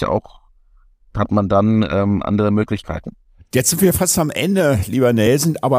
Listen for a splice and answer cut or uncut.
uncut